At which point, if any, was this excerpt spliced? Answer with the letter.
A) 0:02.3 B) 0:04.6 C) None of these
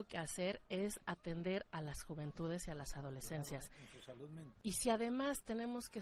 B